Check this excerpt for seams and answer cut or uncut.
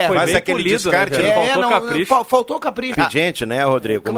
cut